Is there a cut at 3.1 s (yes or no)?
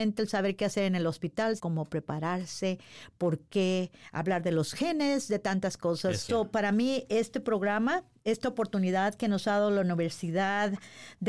no